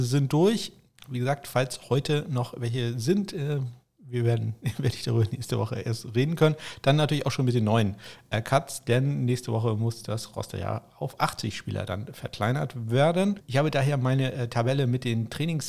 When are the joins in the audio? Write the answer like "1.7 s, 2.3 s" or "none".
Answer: none